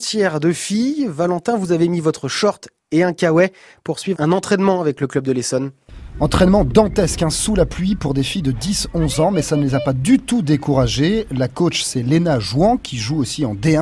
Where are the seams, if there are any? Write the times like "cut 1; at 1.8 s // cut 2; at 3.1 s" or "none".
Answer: cut 1; at 4.1 s